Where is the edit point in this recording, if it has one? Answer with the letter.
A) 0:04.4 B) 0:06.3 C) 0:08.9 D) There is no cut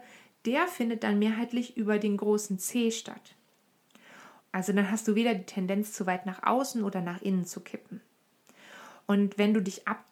A